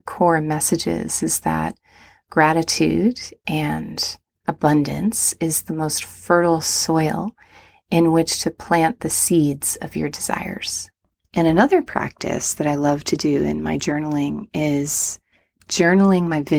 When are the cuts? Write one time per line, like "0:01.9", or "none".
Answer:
0:11.2